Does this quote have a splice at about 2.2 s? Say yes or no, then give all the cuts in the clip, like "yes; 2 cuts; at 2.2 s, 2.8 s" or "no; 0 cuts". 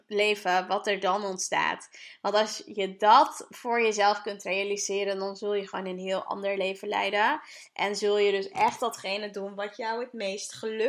no; 0 cuts